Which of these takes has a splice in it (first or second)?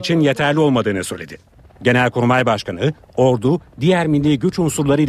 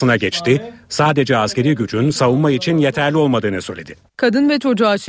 second